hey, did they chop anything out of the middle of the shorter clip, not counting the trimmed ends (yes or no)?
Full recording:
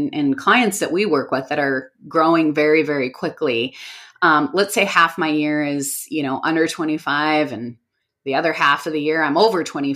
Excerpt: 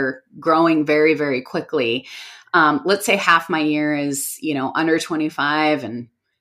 no